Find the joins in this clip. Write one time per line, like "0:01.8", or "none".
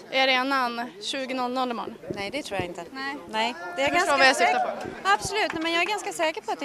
none